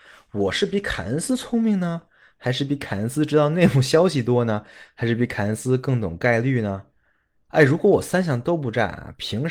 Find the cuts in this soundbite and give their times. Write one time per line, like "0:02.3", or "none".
none